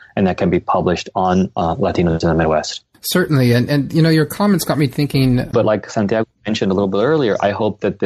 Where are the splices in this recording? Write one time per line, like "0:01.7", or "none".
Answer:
0:05.5